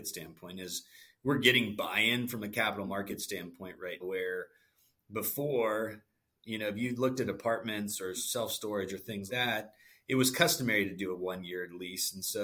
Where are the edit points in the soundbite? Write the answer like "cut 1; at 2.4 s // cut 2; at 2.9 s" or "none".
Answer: cut 1; at 4.0 s // cut 2; at 9.3 s